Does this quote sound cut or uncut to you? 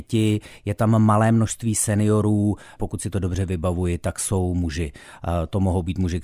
cut